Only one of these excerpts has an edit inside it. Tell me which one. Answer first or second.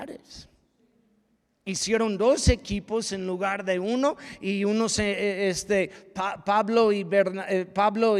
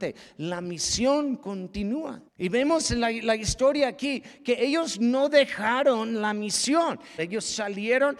second